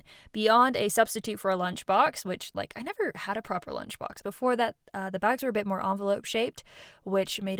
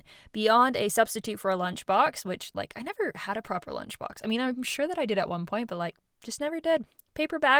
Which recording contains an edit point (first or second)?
first